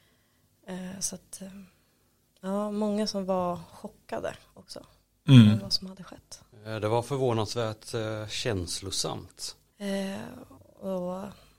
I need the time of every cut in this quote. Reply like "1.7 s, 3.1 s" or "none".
6.5 s, 9.7 s